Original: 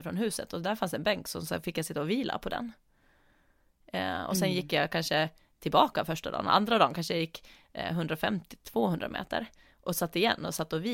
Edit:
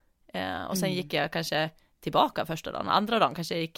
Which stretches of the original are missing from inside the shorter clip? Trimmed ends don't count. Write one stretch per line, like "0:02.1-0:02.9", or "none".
none